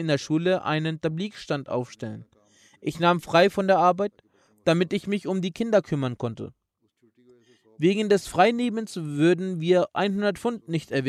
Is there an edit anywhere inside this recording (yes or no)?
no